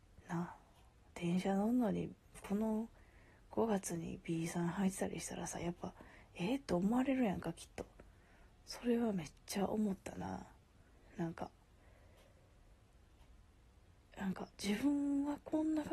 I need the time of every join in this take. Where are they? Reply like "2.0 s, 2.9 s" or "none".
8.5 s, 14.5 s

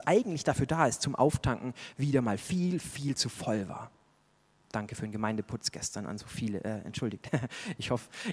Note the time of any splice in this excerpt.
none

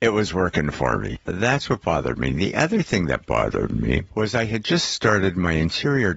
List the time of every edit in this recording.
none

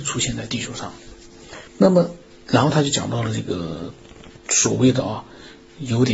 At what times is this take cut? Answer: 1.7 s, 4.4 s

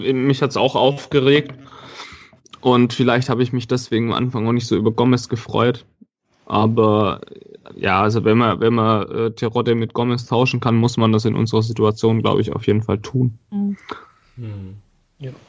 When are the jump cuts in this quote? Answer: none

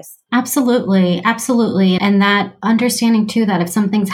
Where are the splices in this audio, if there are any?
none

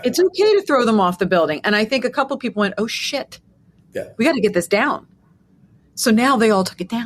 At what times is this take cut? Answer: none

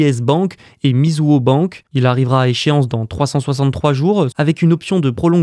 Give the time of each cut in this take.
1.9 s, 4.3 s

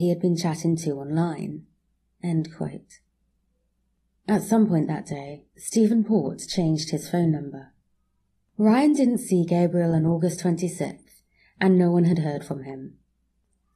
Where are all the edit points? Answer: none

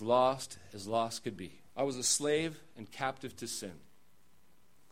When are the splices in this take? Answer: 1.7 s

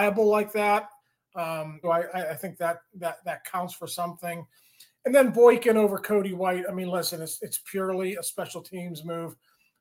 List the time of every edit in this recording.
1.8 s

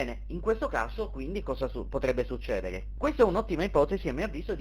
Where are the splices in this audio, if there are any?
3.0 s

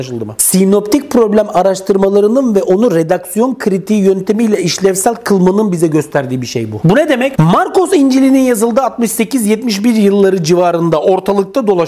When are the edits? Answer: 7.4 s

